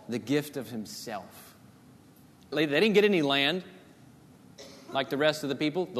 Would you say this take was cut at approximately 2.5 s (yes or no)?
yes